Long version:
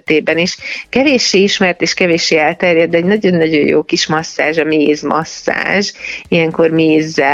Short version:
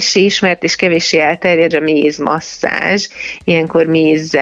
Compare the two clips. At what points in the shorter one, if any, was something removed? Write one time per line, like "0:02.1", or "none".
0:01.7